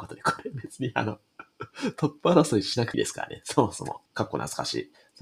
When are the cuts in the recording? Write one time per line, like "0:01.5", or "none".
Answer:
0:02.9
0:04.1